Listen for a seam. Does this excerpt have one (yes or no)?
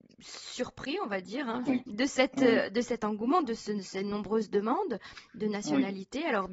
yes